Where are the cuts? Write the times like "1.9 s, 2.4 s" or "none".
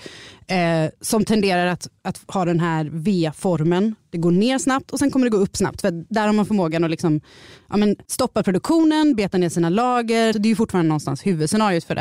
8.0 s, 10.3 s